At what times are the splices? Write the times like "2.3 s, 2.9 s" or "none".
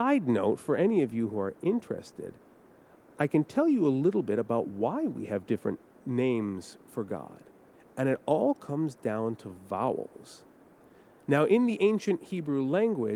none